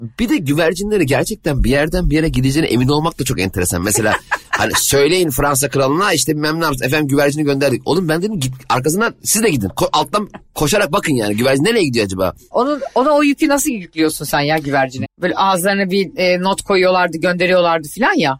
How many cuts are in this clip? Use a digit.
2